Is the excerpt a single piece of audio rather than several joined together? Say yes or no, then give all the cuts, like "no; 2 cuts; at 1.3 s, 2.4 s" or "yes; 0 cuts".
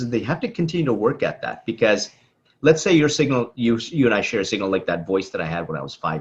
yes; 0 cuts